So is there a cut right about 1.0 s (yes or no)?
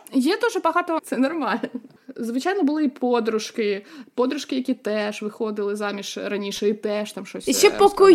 yes